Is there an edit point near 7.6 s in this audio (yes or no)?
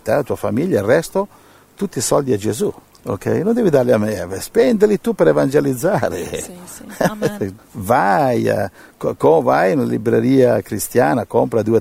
yes